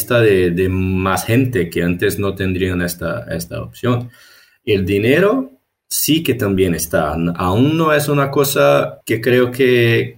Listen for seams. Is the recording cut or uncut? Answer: uncut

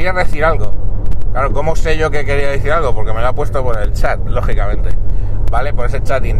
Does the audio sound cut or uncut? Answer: uncut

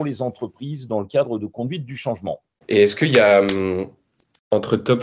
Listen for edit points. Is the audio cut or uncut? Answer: cut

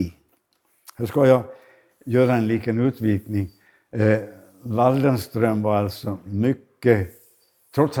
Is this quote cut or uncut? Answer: uncut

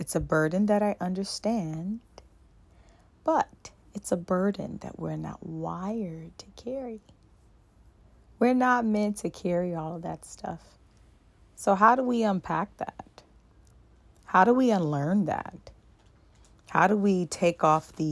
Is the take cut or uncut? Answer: uncut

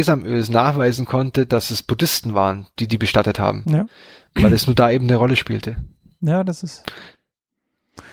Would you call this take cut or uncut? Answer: uncut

